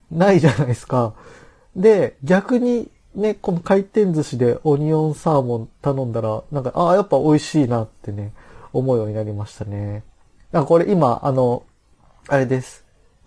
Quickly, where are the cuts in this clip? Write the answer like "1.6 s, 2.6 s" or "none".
none